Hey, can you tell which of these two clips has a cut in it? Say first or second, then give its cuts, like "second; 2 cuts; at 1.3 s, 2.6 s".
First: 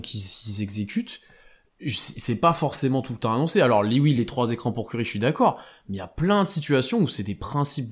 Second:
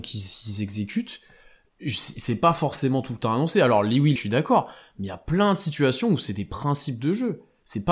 second; 1 cut; at 4.2 s